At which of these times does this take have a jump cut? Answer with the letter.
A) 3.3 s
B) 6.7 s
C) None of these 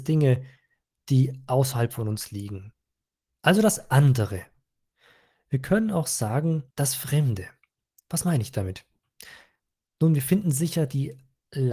B